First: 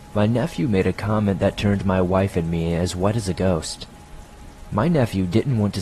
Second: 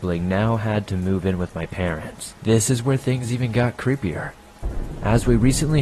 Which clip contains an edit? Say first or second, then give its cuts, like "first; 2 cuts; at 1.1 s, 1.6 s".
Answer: second; 1 cut; at 2.4 s